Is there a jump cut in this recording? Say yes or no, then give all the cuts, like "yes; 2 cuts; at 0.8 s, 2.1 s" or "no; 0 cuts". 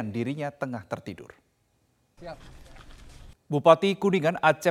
yes; 2 cuts; at 2.2 s, 3.3 s